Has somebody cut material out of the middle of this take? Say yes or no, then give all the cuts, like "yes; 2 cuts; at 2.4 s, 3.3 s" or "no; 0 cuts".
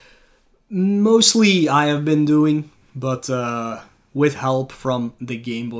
no; 0 cuts